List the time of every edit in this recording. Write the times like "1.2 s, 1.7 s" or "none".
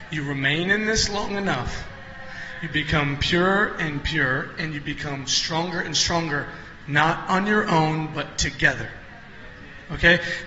none